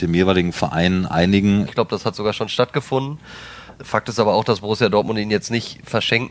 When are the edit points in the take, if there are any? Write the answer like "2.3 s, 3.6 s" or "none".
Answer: 1.7 s